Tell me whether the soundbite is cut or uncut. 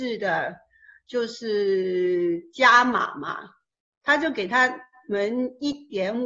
uncut